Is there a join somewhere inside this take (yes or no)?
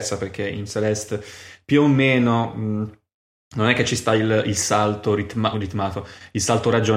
yes